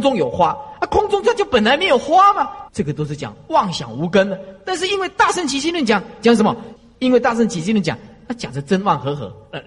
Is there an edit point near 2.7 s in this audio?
yes; 1 cut; at 2.7 s

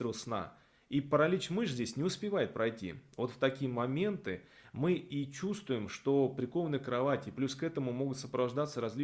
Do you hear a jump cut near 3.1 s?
no; 0 cuts

